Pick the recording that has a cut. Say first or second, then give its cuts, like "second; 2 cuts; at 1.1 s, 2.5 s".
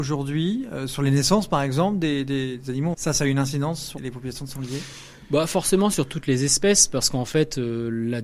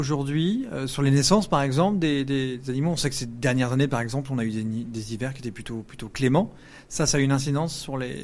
first; 2 cuts; at 2.9 s, 4.0 s